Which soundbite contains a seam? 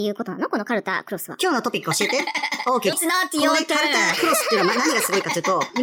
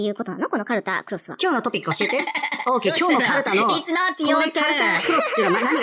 first; 1 cut; at 2.9 s

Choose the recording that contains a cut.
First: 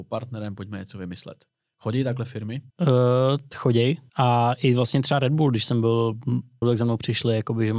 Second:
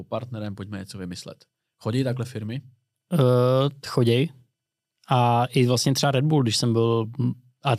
first; 3 cuts; at 2.7 s, 4.1 s, 6.6 s

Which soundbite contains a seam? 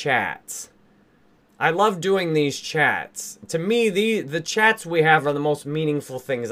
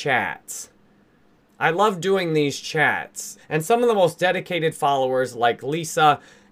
second; 1 cut; at 3.4 s

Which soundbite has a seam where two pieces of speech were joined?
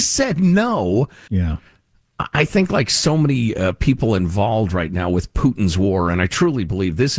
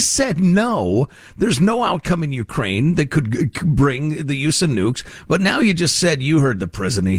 first; 1 cut; at 1.3 s

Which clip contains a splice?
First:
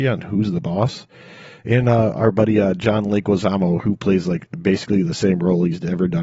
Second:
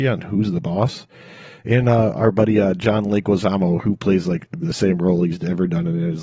second; 1 cut; at 4.6 s

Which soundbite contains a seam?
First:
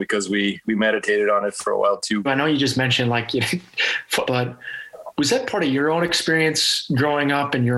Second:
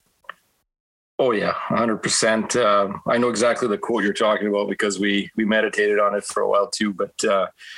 first; 2 cuts; at 2.3 s, 4.3 s

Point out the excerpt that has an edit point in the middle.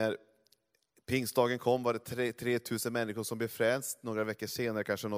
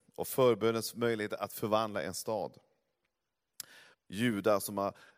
second; 1 cut; at 3.9 s

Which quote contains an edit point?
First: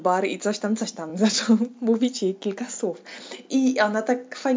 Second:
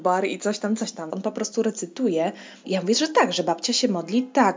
second; 2 cuts; at 1.1 s, 2.6 s

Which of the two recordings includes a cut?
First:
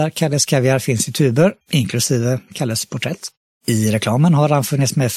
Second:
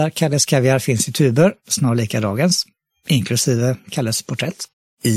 first; 1 cut; at 1.6 s

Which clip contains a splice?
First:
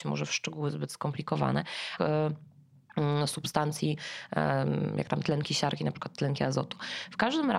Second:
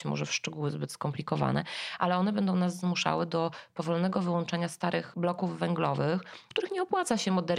first; 1 cut; at 2.0 s

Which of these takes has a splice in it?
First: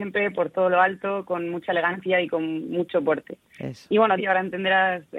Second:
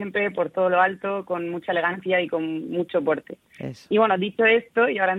first; 1 cut; at 4.2 s

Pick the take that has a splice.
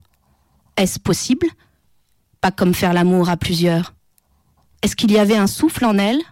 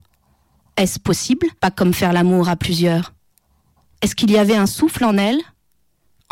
second; 1 cut; at 1.6 s

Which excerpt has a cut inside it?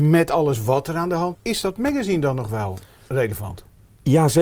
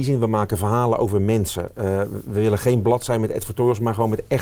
first; 1 cut; at 1.3 s

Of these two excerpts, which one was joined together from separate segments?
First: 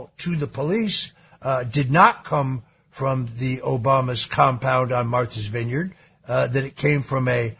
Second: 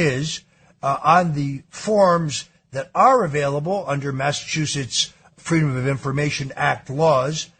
second; 1 cut; at 5.3 s

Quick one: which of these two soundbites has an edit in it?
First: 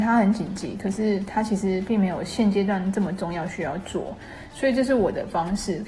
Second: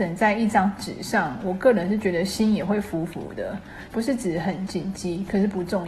second; 1 cut; at 3.9 s

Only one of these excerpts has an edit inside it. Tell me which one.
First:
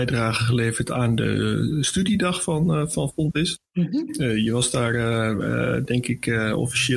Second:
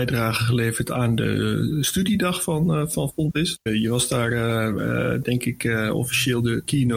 second; 1 cut; at 3.7 s

